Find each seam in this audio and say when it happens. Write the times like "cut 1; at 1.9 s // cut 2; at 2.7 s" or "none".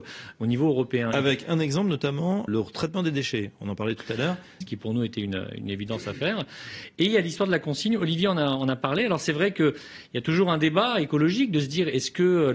cut 1; at 2.5 s // cut 2; at 4.6 s